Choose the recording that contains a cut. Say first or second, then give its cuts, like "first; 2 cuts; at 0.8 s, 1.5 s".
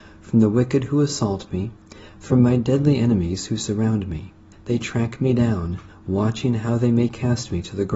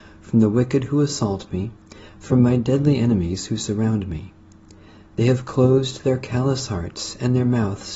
first; 2 cuts; at 4.5 s, 5.9 s